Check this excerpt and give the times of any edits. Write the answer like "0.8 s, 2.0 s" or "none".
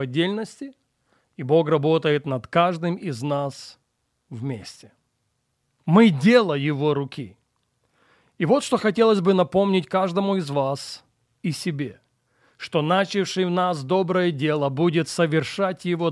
none